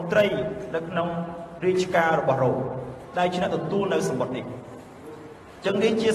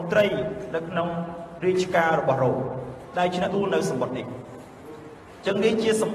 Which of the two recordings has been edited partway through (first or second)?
second